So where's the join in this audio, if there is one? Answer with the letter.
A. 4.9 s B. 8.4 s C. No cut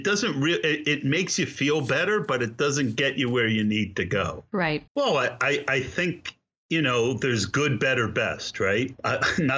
A